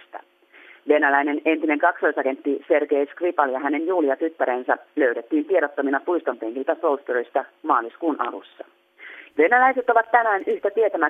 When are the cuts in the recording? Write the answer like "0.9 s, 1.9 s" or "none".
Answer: 9.3 s